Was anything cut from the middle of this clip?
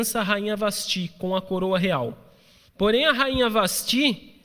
yes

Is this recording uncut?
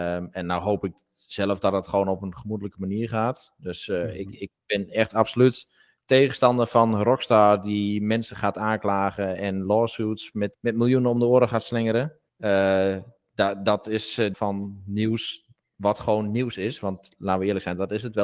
no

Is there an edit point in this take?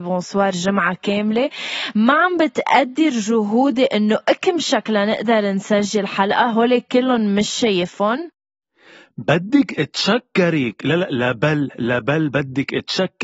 no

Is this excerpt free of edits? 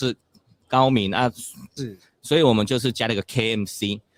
no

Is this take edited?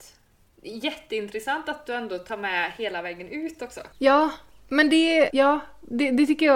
yes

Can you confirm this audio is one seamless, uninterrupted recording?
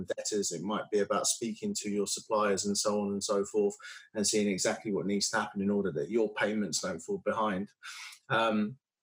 yes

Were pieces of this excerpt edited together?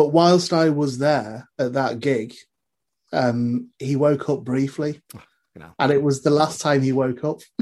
yes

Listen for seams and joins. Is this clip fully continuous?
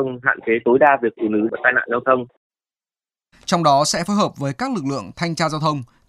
no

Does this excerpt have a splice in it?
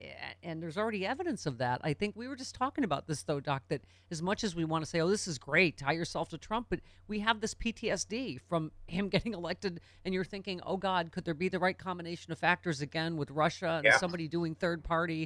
no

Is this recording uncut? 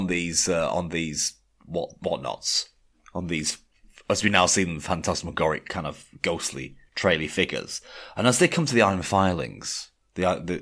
yes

